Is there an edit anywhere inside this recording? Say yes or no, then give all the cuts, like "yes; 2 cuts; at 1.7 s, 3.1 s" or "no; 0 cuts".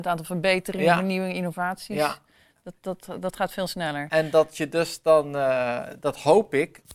no; 0 cuts